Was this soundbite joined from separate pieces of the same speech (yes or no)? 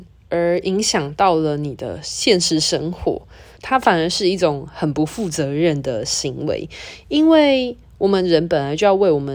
yes